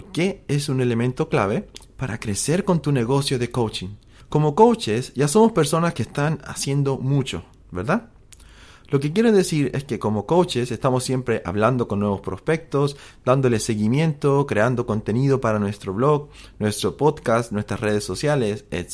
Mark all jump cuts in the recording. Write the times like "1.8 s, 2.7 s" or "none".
4.2 s